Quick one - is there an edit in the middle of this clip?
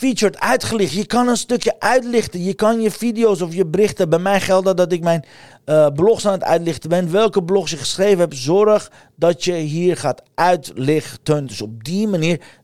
yes; 1 cut; at 11.4 s

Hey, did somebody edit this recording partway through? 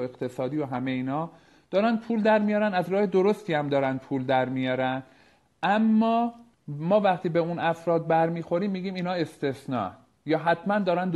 no; 0 cuts

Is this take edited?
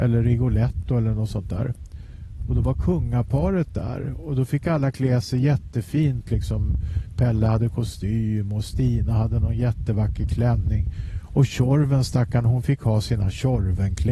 no; 0 cuts

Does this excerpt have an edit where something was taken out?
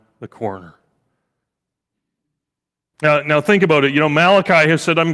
no; 0 cuts

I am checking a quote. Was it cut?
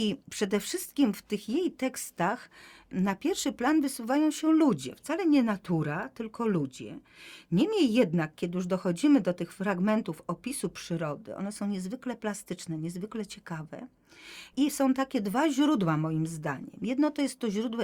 no; 0 cuts

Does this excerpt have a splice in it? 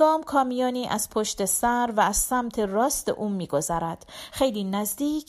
no; 0 cuts

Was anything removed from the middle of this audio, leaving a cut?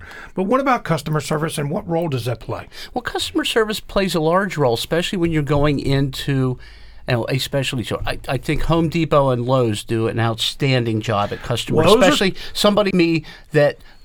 yes; 2 cuts; at 11.8 s, 12.9 s

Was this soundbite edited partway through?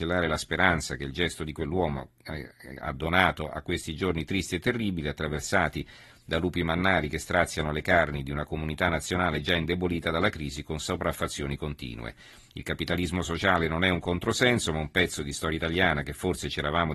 no; 0 cuts

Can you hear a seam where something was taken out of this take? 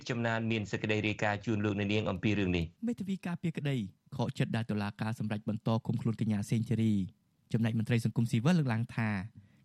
yes; 1 cut; at 2.8 s

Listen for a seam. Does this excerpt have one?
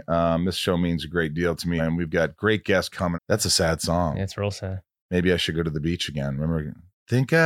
yes; 2 cuts; at 1.8 s, 3.1 s

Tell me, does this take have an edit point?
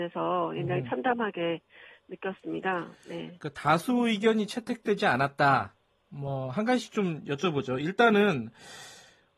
no; 0 cuts

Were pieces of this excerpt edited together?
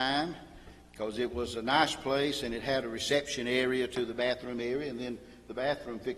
no; 0 cuts

